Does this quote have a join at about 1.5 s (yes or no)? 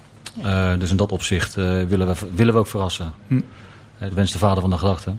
no